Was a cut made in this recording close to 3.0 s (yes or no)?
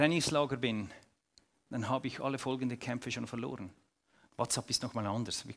no